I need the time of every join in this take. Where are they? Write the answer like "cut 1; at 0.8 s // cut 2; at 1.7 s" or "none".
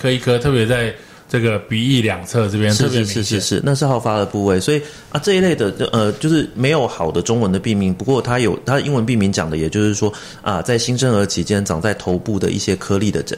none